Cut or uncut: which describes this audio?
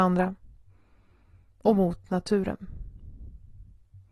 uncut